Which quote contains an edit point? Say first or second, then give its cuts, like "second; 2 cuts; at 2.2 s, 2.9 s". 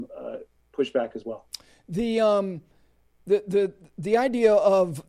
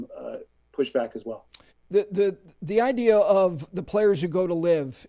second; 1 cut; at 1.7 s